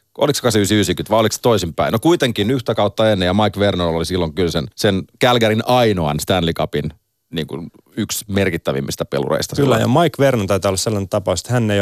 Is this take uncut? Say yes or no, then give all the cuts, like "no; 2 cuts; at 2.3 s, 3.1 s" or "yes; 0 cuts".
no; 1 cut; at 4.7 s